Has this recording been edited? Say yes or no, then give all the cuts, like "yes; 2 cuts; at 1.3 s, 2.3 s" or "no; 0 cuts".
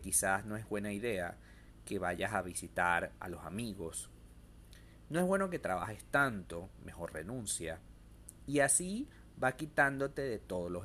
no; 0 cuts